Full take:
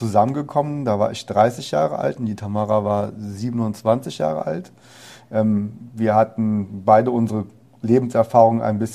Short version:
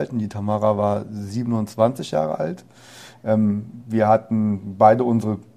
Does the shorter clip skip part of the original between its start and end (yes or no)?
no